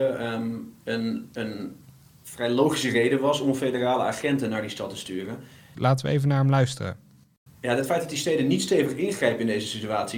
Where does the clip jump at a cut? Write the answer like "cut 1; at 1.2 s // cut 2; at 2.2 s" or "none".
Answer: cut 1; at 5.7 s // cut 2; at 7.5 s